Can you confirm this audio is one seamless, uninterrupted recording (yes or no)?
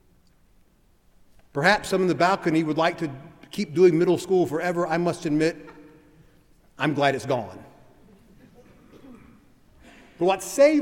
yes